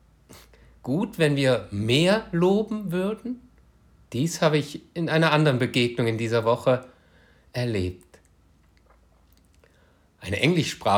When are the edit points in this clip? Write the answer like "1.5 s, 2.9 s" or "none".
4.0 s

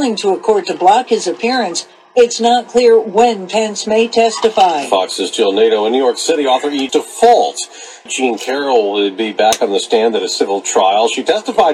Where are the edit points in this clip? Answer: 6.9 s, 8.1 s

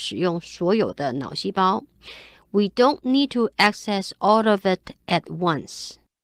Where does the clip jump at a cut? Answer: none

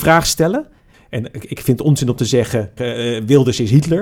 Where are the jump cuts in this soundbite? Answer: 0.9 s, 2.8 s

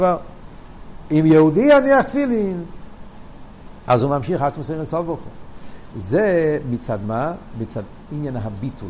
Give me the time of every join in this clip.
none

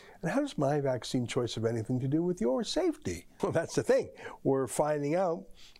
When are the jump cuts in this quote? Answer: 3.4 s

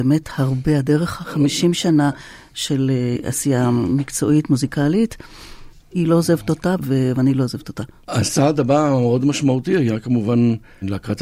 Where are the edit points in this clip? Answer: 5.7 s

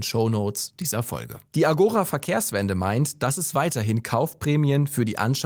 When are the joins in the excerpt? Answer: 1.5 s

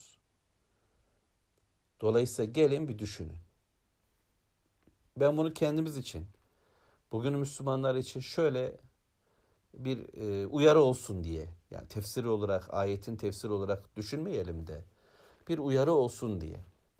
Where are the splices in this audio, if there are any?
none

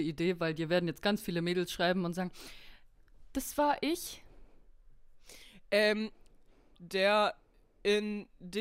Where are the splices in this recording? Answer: 6.7 s

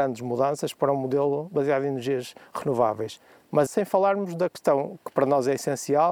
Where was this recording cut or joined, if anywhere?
3.7 s

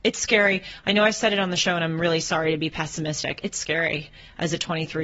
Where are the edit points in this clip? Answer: none

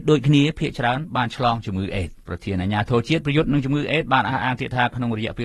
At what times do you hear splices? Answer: 2.2 s

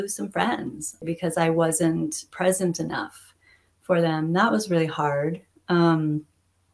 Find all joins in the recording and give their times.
1.0 s

